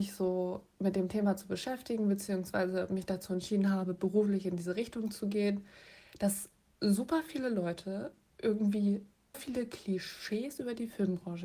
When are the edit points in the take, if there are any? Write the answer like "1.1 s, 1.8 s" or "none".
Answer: 9.3 s